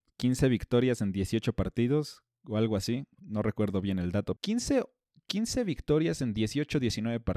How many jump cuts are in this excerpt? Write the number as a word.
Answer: one